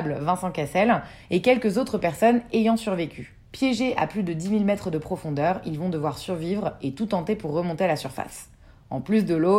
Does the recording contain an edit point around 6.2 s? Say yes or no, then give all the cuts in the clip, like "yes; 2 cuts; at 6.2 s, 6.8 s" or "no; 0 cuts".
no; 1 cut; at 3.5 s